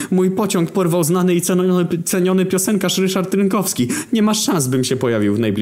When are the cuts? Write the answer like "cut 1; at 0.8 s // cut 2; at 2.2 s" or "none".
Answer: none